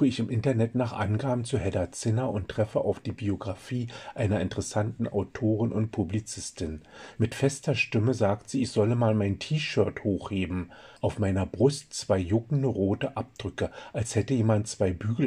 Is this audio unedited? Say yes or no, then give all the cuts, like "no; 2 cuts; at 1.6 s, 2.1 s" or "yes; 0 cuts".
no; 2 cuts; at 7.2 s, 11.0 s